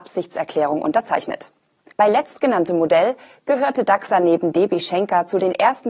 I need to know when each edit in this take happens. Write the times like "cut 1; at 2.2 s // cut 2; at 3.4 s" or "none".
cut 1; at 1.9 s